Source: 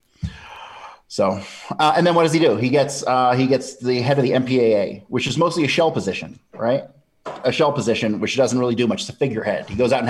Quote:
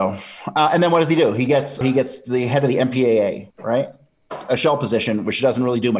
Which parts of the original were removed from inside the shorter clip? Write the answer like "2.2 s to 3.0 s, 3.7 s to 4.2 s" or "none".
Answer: 3.0 s to 3.4 s, 5.0 s to 6.5 s